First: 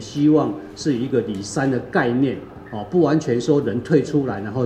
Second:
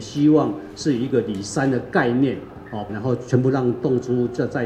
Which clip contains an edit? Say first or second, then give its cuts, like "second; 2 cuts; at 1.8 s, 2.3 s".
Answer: second; 1 cut; at 2.9 s